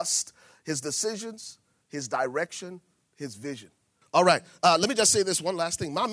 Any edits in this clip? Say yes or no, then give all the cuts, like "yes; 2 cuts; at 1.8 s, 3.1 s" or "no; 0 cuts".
yes; 1 cut; at 4.0 s